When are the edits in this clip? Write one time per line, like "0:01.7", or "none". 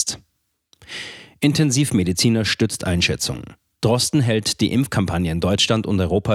0:03.8